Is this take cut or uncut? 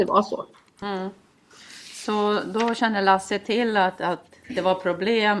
uncut